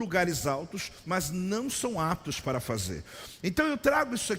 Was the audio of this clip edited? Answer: yes; 1 cut; at 1.0 s

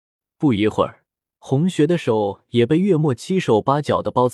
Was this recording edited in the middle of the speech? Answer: yes; 1 cut; at 1.3 s

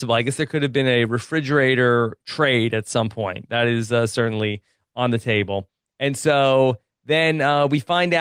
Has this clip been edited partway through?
no; 0 cuts

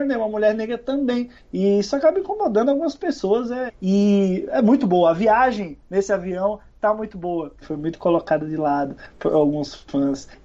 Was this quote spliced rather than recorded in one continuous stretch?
yes; 2 cuts; at 3.7 s, 7.6 s

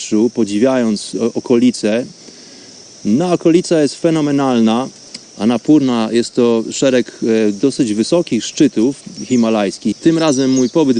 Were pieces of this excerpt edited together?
yes; 2 cuts; at 5.2 s, 9.9 s

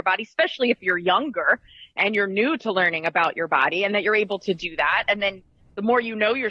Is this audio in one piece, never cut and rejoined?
yes; 0 cuts

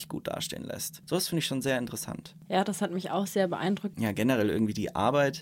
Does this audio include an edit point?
yes; 1 cut; at 3.9 s

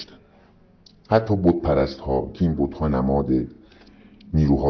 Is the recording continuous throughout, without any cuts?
yes; 0 cuts

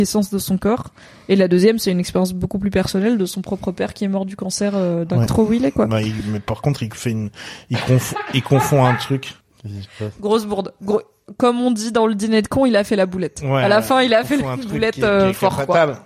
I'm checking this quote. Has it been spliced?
yes; 2 cuts; at 5.3 s, 9.4 s

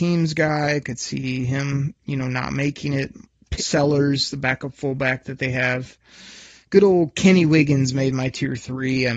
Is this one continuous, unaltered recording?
no; 2 cuts; at 3.6 s, 6.6 s

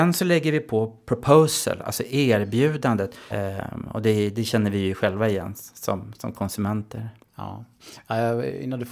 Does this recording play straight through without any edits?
no; 1 cut; at 3.3 s

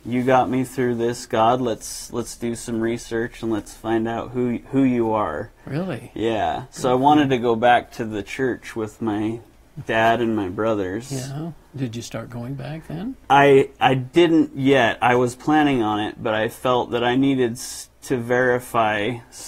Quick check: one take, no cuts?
yes; 0 cuts

